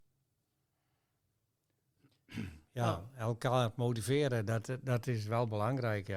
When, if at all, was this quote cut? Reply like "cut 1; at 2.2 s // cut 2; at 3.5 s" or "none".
none